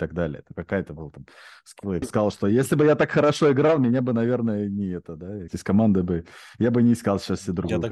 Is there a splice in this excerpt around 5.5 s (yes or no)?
yes